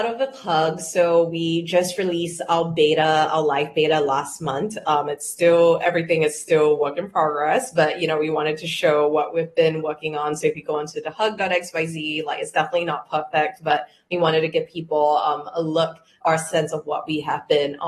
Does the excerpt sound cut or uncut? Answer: uncut